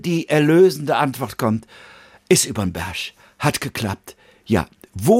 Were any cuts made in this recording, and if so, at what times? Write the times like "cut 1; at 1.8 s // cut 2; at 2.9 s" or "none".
none